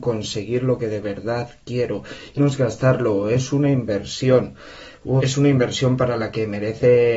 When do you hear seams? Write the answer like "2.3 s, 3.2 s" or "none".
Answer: 2.4 s, 5.2 s